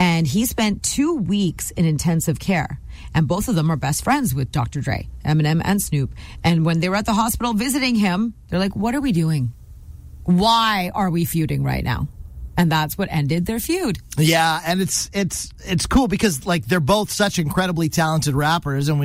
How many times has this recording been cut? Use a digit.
0